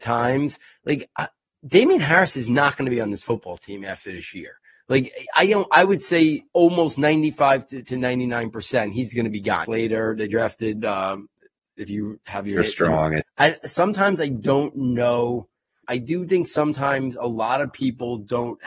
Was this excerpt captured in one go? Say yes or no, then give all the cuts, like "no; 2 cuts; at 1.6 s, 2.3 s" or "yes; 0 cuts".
no; 3 cuts; at 9.6 s, 13.2 s, 15.8 s